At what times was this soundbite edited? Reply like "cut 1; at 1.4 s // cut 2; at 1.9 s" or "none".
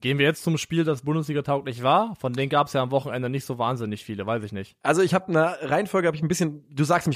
none